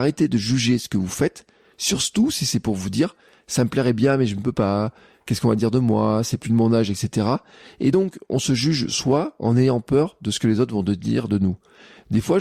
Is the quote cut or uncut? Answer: uncut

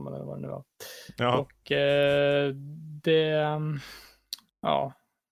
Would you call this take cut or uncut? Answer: uncut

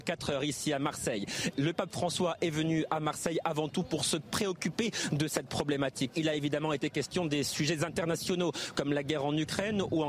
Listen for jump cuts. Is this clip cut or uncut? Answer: cut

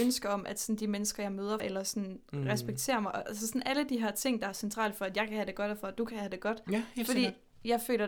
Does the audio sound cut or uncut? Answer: cut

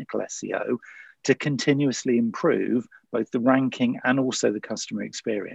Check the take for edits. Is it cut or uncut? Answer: uncut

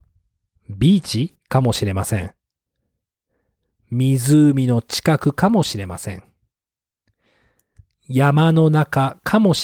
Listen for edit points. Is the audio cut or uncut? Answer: uncut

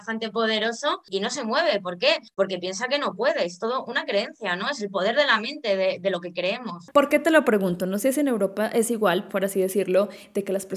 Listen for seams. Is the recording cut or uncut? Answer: cut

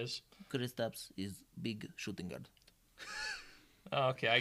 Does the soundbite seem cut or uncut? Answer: cut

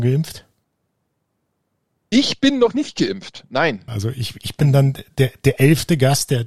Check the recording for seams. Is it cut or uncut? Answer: cut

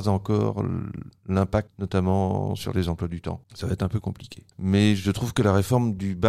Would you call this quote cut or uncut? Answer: uncut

